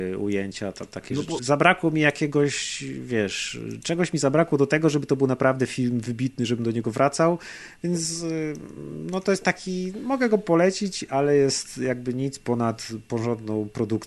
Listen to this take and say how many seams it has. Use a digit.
1